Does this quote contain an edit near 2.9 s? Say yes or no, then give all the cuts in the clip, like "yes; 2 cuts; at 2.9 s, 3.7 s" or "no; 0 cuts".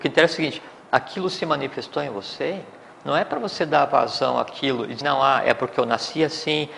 no; 1 cut; at 5.0 s